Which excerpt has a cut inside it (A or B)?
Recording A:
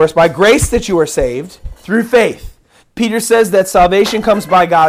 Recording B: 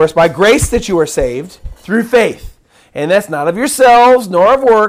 A